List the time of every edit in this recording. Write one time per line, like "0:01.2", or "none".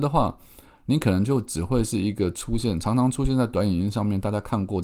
none